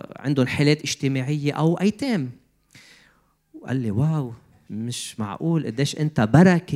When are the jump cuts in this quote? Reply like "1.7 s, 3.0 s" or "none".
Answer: 4.7 s